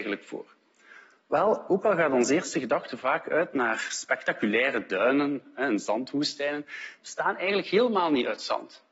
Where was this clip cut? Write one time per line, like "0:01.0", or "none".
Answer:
0:07.0